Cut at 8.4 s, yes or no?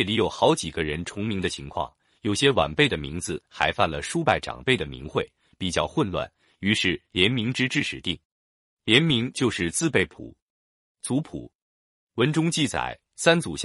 no